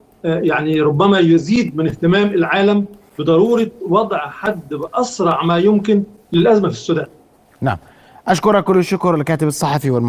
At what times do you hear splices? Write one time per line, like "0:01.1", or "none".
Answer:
none